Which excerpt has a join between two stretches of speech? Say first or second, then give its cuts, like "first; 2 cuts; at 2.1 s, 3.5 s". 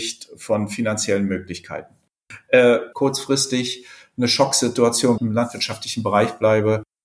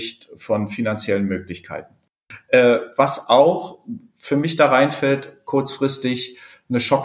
first; 2 cuts; at 2.9 s, 5.2 s